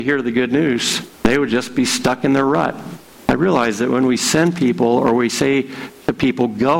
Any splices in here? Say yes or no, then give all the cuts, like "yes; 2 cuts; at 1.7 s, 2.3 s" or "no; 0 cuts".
yes; 2 cuts; at 1.1 s, 3.2 s